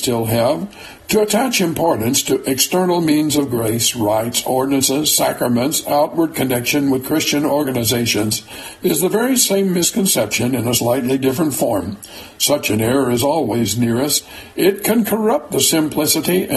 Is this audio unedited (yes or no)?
yes